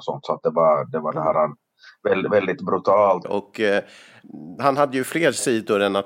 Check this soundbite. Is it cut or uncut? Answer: cut